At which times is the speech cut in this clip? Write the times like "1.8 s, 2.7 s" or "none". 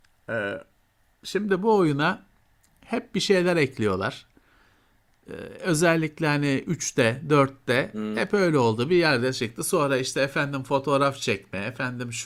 none